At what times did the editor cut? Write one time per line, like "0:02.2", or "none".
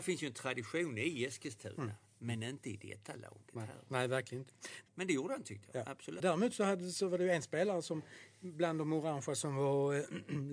0:04.9
0:06.2

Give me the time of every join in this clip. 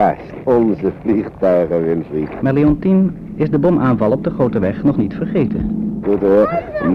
0:02.4
0:06.0

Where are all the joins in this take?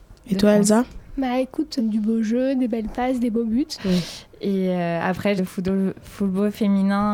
0:01.8
0:03.8
0:05.4

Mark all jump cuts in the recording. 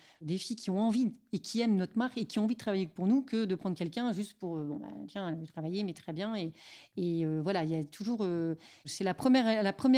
none

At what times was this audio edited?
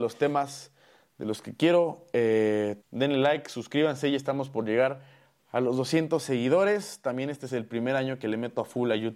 0:02.8

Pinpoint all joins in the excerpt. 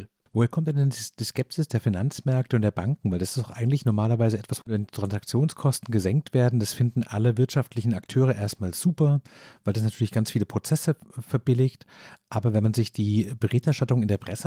0:04.6

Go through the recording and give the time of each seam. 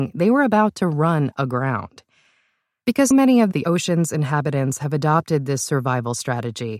0:03.1

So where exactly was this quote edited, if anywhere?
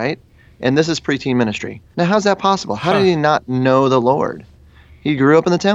0:01.9

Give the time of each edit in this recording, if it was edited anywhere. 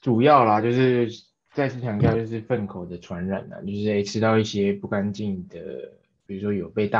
none

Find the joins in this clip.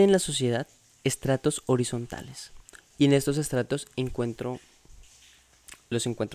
0:02.9

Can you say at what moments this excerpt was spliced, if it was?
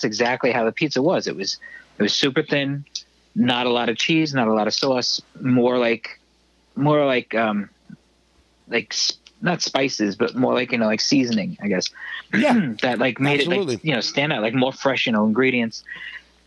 none

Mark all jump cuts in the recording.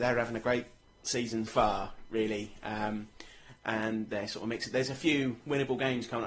0:01.5

